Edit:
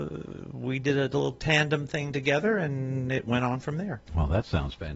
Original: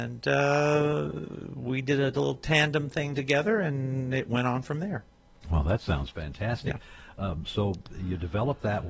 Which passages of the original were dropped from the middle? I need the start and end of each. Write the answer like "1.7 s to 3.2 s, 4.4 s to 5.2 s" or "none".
5.1 s to 5.4 s